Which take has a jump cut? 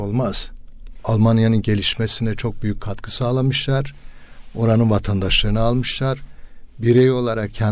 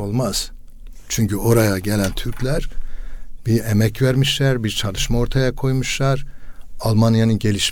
first; 1 cut; at 1.0 s

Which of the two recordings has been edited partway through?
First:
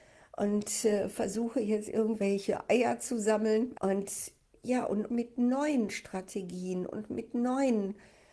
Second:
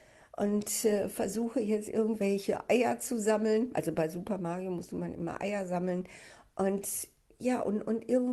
first; 2 cuts; at 3.7 s, 5.1 s

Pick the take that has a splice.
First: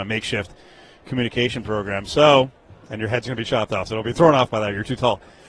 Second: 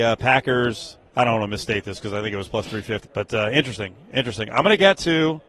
second; 1 cut; at 3.0 s

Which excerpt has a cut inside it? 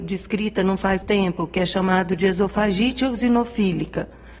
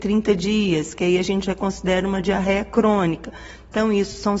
first; 1 cut; at 1.0 s

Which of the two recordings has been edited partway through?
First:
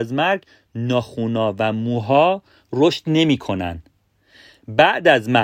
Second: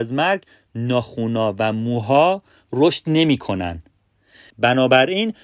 second; 1 cut; at 4.5 s

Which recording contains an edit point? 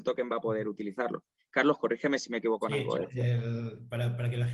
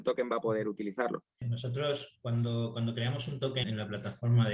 second; 2 cuts; at 1.4 s, 3.6 s

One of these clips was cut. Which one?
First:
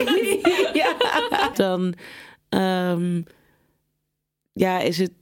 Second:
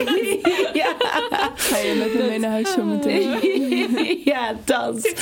first; 1 cut; at 1.5 s

